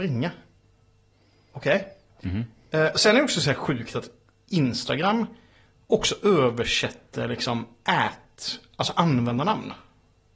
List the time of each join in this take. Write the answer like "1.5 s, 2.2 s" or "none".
none